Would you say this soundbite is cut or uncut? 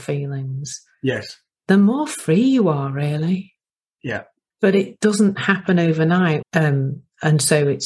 cut